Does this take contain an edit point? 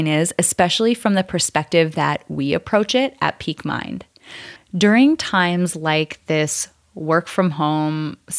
yes; 1 cut; at 4.6 s

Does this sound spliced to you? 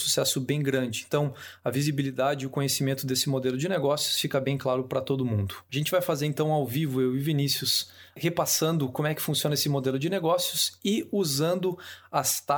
no; 0 cuts

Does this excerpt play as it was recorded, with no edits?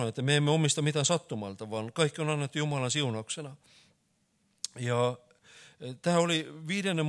yes; 0 cuts

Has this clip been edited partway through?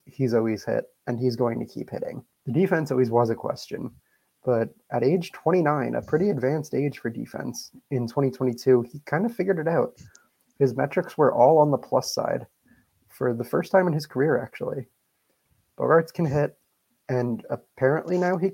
yes; 1 cut; at 2.3 s

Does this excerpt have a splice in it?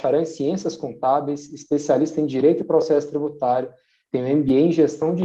no; 0 cuts

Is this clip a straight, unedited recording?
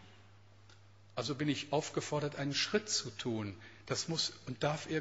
yes; 0 cuts

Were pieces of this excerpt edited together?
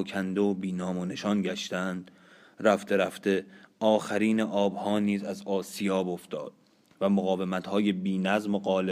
no; 0 cuts

